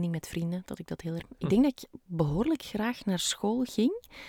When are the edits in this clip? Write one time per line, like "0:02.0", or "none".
0:01.2